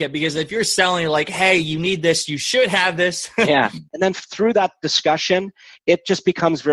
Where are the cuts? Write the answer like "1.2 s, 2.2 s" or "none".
3.9 s